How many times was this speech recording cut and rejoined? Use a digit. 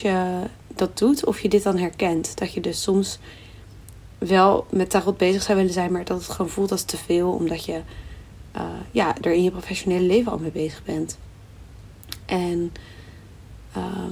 0